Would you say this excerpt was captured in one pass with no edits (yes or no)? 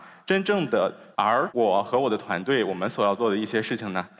no